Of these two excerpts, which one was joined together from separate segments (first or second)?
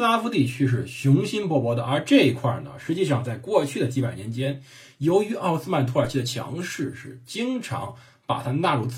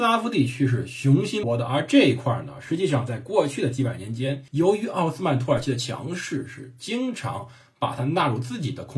second